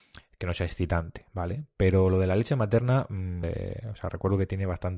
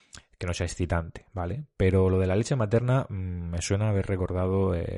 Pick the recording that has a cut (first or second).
first